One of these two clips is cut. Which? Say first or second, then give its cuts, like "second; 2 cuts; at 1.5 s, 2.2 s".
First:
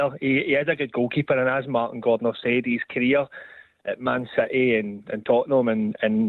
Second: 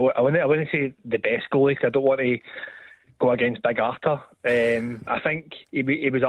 second; 1 cut; at 5.1 s